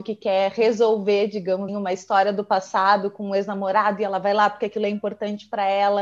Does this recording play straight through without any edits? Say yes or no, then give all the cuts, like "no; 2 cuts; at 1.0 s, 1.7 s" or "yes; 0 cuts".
no; 1 cut; at 1.7 s